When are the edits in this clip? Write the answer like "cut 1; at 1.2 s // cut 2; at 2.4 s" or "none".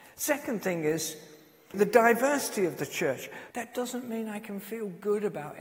cut 1; at 1.7 s // cut 2; at 3.5 s